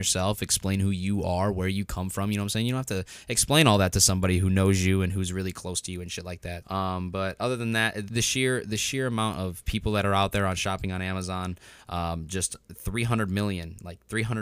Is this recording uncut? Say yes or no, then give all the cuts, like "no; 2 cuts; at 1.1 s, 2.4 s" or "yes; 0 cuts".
no; 2 cuts; at 6.6 s, 8.1 s